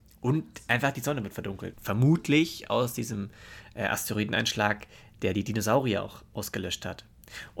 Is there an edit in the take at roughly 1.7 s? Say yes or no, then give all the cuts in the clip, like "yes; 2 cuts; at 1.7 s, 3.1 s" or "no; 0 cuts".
yes; 1 cut; at 1.7 s